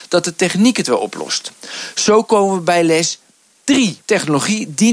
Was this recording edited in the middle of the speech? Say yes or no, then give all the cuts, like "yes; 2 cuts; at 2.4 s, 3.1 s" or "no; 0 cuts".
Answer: yes; 1 cut; at 4.0 s